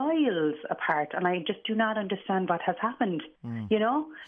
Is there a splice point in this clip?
yes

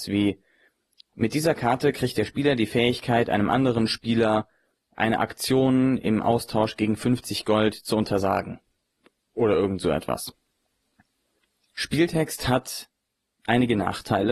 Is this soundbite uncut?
yes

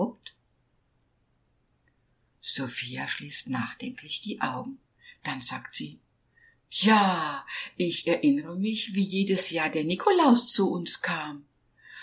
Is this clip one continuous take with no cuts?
yes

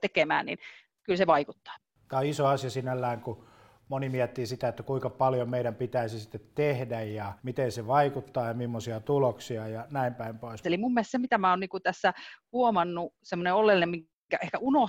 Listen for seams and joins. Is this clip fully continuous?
no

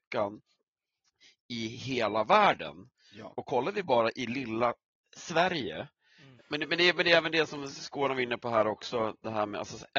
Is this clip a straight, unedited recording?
no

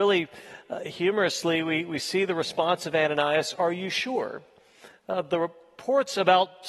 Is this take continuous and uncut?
yes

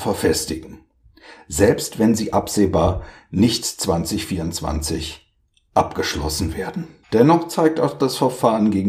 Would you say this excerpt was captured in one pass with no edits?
no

